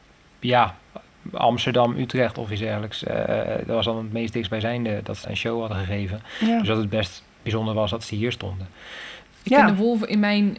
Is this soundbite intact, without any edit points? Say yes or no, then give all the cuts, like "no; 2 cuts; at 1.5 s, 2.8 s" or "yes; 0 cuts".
no; 2 cuts; at 5.2 s, 9.2 s